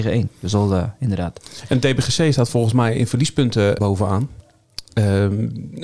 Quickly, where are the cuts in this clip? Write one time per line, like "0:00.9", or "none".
0:03.8